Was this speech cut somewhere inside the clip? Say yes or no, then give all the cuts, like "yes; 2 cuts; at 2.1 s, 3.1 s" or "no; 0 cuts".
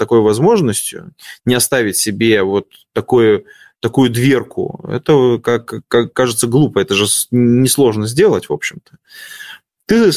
no; 0 cuts